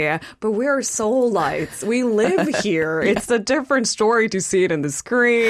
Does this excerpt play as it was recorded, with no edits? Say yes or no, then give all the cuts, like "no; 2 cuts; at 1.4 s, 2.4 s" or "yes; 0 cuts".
yes; 0 cuts